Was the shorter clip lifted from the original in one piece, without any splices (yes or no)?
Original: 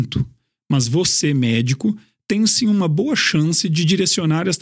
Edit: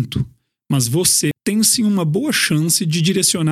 no